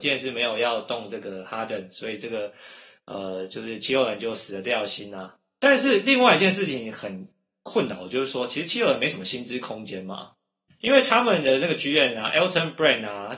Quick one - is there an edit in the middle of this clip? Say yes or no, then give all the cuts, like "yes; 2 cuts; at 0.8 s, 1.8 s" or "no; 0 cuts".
no; 0 cuts